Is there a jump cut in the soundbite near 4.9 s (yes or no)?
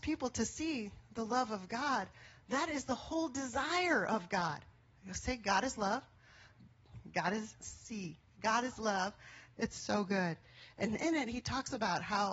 no